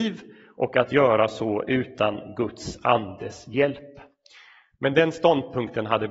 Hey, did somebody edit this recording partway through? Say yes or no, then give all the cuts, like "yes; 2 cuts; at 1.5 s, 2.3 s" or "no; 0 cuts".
no; 0 cuts